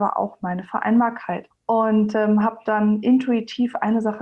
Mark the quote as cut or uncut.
cut